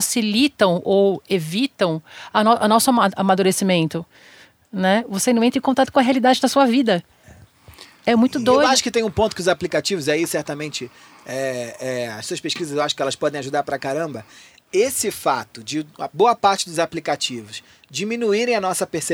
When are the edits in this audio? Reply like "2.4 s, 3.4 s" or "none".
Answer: none